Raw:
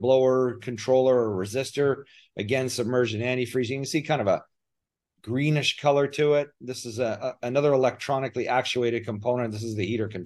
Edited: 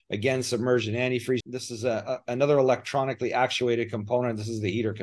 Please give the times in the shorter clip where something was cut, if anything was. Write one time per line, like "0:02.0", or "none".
0:01.4

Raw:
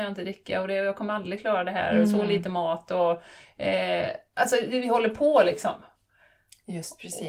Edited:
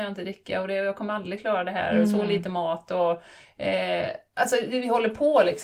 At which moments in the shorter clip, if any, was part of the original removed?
none

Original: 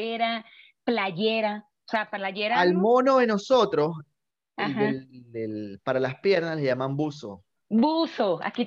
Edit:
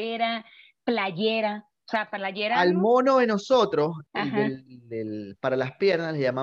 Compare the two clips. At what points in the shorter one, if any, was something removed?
0:04.1

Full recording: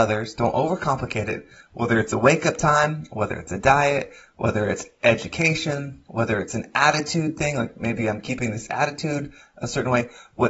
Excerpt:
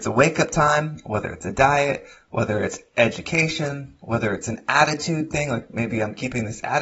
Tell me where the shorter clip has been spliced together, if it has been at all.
none

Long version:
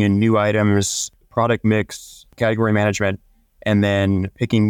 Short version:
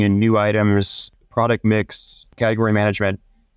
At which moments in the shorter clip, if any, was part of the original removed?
none

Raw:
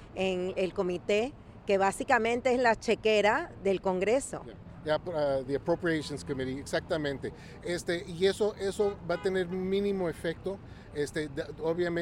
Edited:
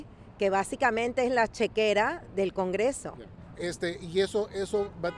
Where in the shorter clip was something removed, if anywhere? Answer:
0:03.5

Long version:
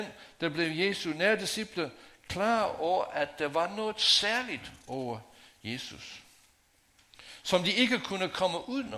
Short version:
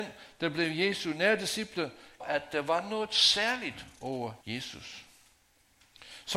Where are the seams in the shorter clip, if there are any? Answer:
0:02.2
0:04.4

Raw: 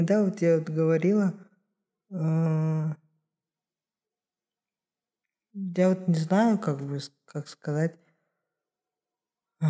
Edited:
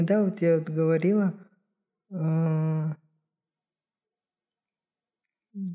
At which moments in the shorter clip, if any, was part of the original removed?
none

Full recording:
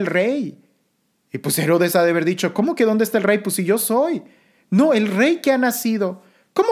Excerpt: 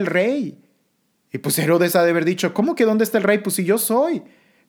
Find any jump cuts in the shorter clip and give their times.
none

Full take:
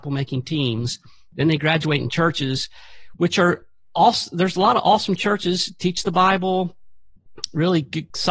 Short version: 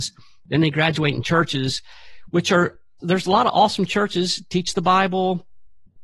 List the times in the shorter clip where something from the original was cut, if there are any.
0:03.0

